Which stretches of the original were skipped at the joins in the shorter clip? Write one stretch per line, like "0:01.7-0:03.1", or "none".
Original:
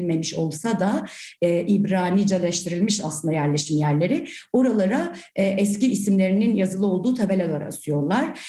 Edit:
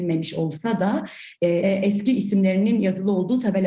0:01.6-0:05.4